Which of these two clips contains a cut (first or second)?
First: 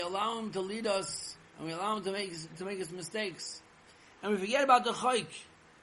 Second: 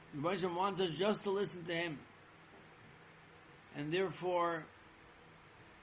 first